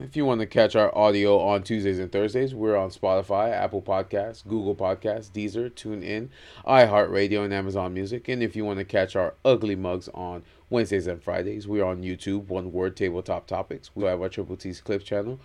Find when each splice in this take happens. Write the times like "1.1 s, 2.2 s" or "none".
14.0 s